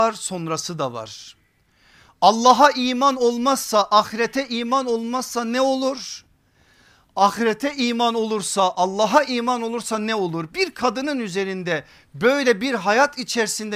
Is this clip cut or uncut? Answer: uncut